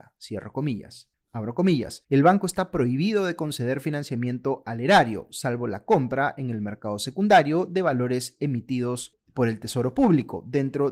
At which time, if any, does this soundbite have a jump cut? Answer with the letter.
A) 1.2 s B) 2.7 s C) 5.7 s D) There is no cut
A